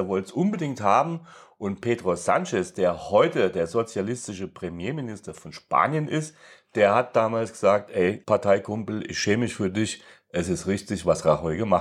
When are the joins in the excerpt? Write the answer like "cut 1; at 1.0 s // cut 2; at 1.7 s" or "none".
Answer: none